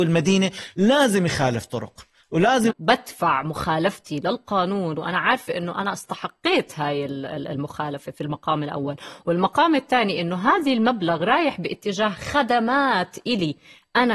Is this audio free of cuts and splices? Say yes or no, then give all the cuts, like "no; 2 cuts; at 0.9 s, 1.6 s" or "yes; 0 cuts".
no; 1 cut; at 2.7 s